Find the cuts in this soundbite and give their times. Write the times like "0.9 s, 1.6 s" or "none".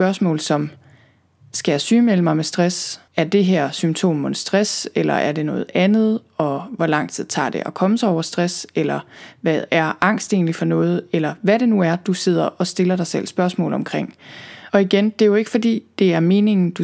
3.1 s

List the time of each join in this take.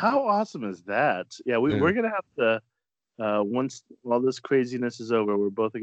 none

